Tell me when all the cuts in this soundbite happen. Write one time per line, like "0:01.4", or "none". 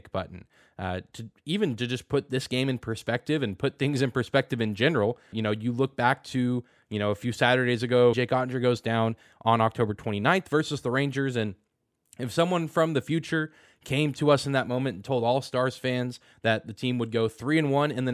0:05.3
0:08.1

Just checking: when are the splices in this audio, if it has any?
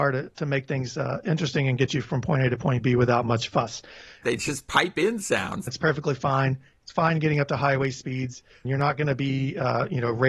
0:04.2
0:05.7
0:08.6

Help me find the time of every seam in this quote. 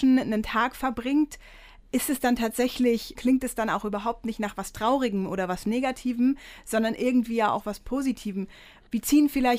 0:03.2

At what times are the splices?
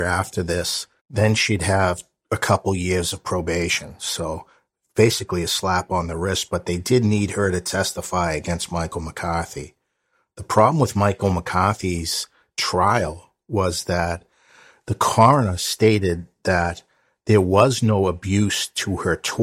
0:01.0

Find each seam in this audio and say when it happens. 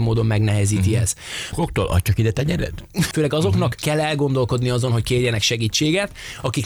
0:01.5
0:03.1

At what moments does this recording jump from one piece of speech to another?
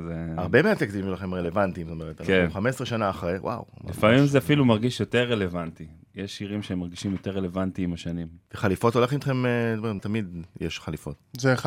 0:08.5
0:10.0

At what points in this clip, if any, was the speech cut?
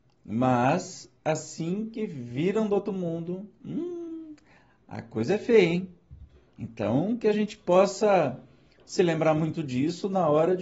0:06.5

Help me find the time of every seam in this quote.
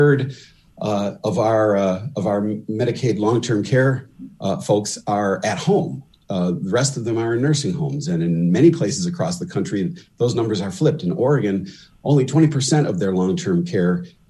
none

